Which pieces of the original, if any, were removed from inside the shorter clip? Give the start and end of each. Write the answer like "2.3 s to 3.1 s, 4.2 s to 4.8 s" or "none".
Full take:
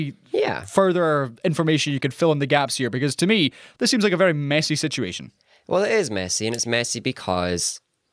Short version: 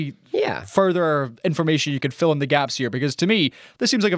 none